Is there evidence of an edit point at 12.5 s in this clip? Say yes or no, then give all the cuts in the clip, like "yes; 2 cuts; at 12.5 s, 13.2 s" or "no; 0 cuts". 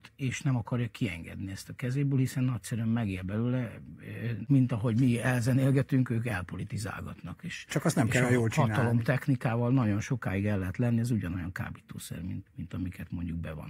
yes; 1 cut; at 12.5 s